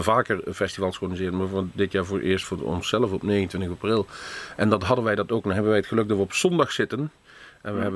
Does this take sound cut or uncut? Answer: uncut